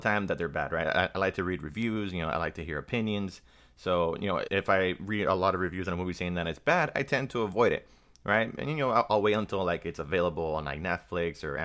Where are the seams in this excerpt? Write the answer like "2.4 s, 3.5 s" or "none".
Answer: 4.5 s